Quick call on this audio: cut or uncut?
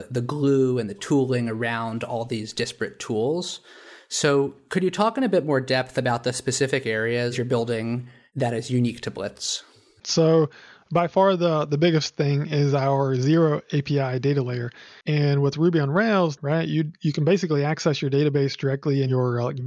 cut